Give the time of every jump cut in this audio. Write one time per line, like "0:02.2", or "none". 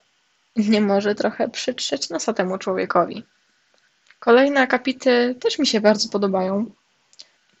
none